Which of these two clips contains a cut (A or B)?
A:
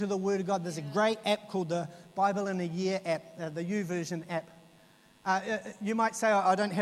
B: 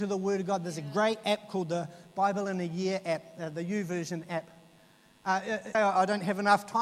B